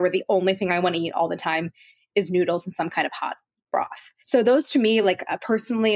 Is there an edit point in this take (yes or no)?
no